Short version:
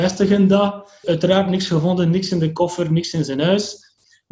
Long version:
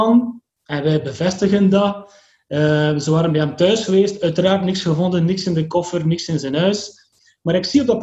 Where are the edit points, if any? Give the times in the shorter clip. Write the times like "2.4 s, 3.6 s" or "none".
1.0 s

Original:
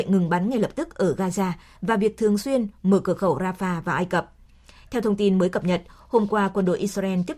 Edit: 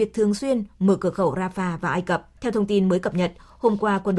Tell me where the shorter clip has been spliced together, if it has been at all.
2.4 s

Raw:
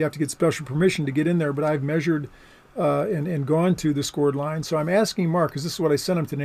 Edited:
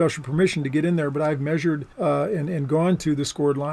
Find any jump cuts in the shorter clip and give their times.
1.9 s

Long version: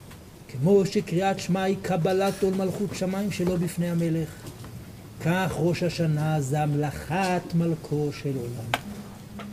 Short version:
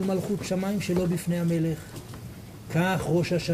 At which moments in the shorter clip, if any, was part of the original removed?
none

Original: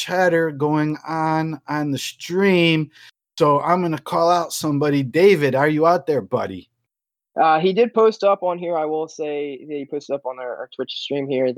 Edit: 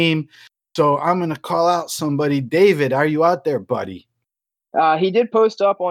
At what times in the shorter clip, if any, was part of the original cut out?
none

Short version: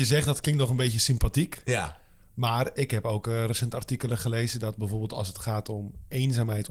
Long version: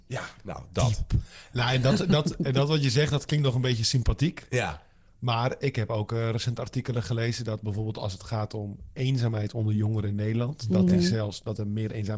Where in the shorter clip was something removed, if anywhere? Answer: none

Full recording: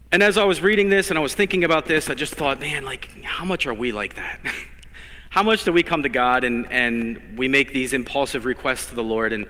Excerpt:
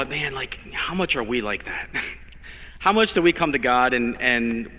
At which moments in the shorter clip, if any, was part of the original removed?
none

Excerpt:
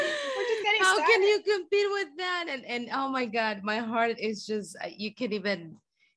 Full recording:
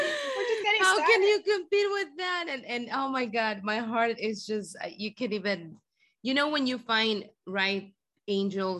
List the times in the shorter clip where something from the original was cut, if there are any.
none

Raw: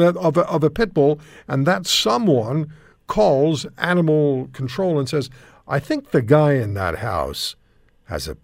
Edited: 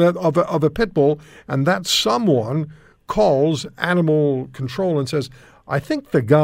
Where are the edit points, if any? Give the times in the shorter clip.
none

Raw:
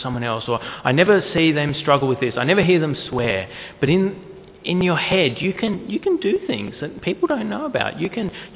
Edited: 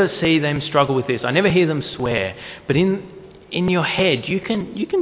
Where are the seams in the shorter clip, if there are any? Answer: none

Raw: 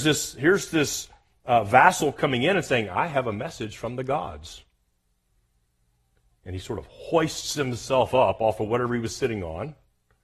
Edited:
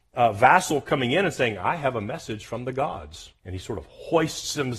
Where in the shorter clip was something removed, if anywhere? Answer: 3.4 s

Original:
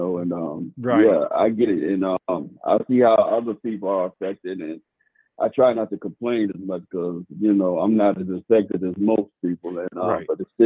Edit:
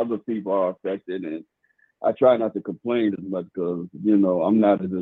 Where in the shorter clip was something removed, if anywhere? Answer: none

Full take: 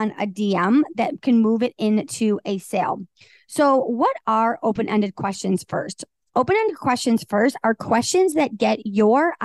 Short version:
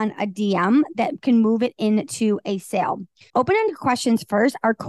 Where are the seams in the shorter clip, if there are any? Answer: 3.3 s

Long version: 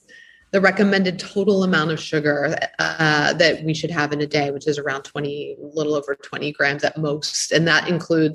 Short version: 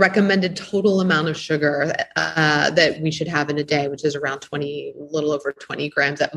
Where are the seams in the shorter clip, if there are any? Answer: none

